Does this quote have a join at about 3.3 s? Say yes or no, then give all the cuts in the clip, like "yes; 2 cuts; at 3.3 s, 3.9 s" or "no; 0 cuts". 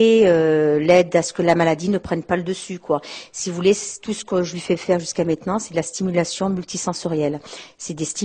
no; 0 cuts